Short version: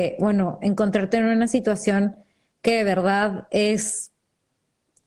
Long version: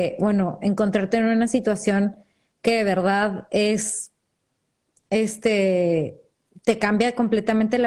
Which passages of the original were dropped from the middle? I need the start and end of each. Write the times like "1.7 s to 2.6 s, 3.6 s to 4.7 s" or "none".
none

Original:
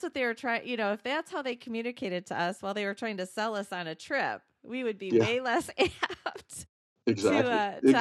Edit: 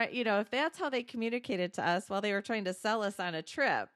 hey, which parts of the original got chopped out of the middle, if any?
none

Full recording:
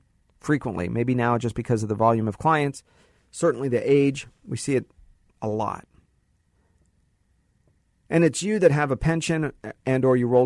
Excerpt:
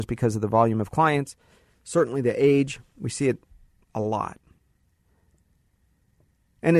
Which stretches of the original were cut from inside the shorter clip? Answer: none

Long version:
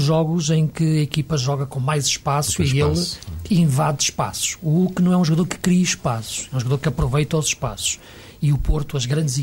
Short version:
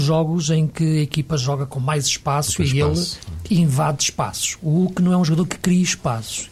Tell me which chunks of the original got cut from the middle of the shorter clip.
none

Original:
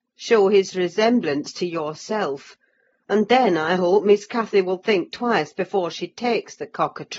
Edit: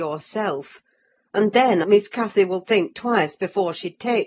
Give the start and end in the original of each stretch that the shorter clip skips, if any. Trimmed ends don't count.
3.6 s to 4.0 s

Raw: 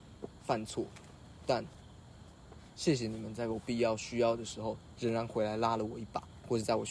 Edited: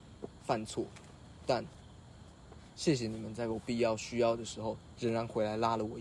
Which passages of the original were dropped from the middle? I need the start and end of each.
none

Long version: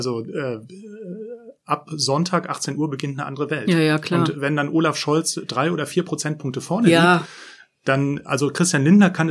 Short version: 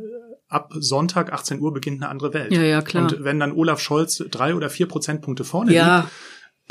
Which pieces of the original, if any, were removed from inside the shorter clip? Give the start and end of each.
none

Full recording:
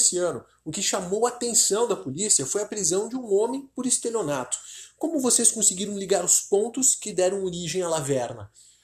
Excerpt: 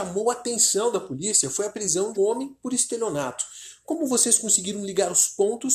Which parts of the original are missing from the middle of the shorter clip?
3.1 s to 3.3 s

